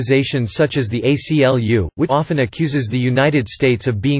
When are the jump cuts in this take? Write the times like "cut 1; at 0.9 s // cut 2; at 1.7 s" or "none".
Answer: cut 1; at 2.1 s